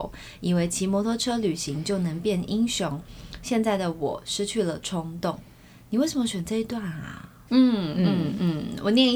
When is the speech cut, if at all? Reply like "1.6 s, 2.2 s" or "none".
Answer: 7.5 s